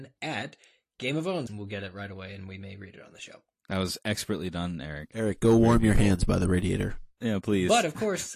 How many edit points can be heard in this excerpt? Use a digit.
1